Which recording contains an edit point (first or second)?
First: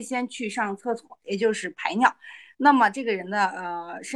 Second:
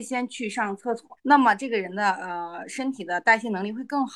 second